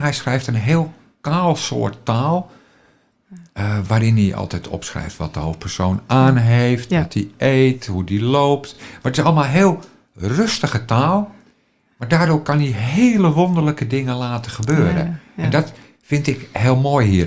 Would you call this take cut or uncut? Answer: uncut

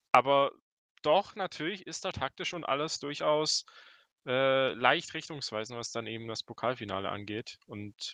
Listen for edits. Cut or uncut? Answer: cut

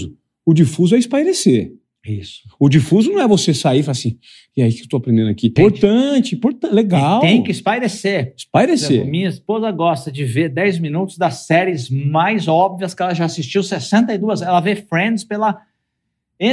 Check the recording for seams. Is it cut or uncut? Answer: cut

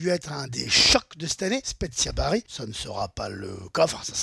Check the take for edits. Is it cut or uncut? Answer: uncut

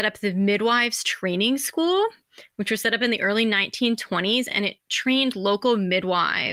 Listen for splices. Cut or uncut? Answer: uncut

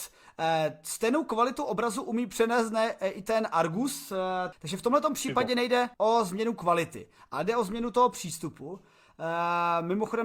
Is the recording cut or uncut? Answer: cut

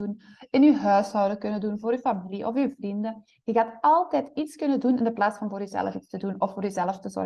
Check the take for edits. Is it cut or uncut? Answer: cut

